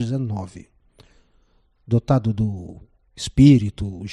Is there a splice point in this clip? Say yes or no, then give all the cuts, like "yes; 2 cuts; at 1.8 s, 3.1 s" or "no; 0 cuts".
no; 0 cuts